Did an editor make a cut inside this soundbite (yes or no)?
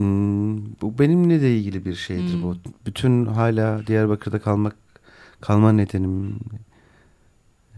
no